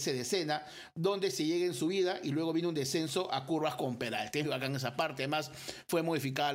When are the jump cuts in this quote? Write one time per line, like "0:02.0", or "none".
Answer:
0:04.4